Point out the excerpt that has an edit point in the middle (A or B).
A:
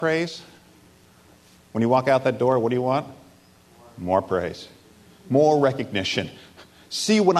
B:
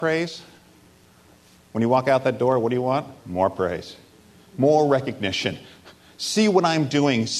B